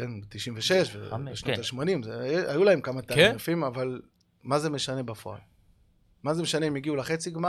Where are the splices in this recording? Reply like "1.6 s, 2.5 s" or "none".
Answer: none